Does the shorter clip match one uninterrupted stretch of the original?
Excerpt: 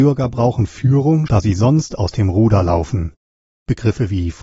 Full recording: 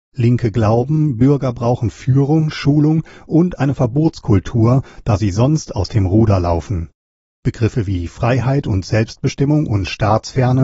no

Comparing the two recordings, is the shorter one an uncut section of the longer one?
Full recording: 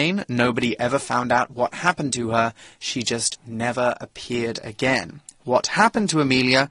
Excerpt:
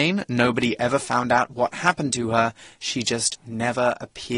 yes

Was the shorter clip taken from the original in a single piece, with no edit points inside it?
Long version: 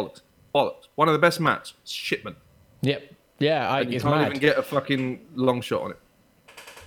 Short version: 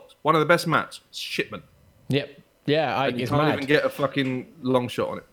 yes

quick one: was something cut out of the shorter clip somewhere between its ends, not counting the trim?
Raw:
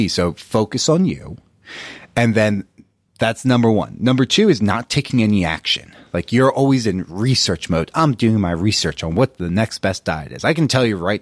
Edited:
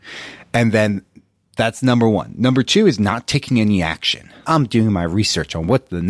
yes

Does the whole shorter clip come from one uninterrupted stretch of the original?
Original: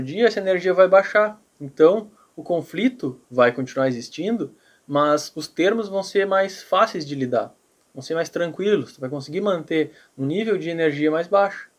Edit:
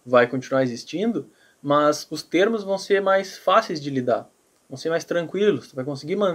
yes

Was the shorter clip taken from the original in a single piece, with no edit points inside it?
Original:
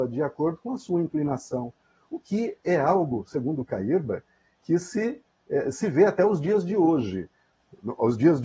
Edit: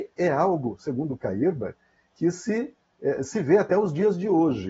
yes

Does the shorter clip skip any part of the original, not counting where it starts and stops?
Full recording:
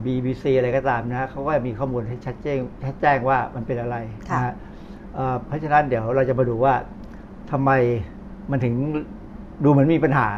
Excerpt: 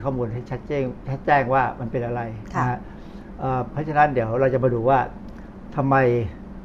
no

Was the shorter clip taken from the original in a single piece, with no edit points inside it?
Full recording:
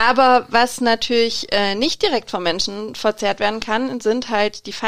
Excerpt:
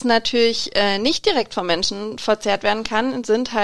yes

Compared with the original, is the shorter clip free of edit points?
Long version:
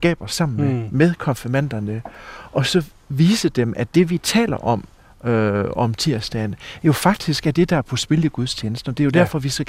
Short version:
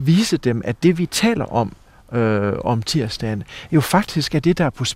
yes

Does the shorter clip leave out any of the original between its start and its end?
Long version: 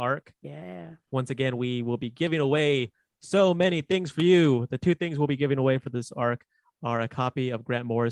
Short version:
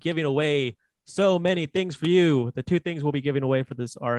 no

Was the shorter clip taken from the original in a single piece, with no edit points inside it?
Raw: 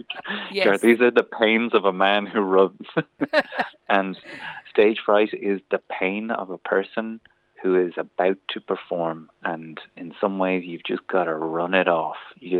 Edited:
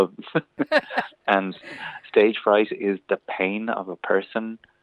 yes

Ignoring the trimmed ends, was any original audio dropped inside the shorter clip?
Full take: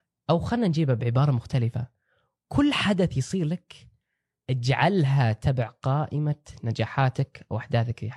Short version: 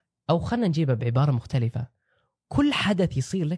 no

